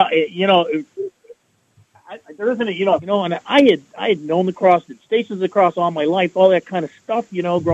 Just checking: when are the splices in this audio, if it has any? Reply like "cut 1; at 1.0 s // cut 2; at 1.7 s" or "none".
cut 1; at 3.0 s

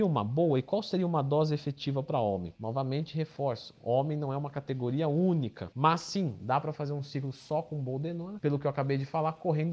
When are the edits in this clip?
none

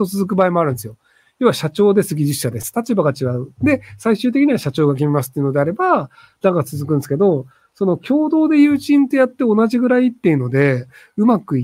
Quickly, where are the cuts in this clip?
none

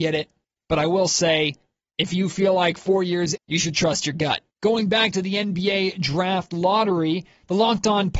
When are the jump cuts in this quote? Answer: cut 1; at 3.4 s // cut 2; at 4.5 s

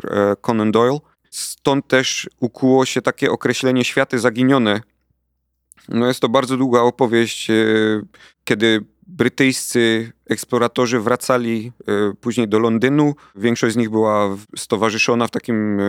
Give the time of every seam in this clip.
cut 1; at 1.2 s

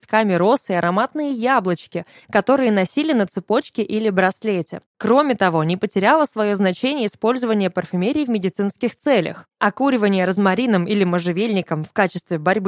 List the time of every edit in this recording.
none

